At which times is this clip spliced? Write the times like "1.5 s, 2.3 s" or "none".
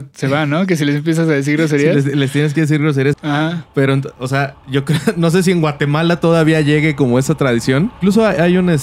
3.1 s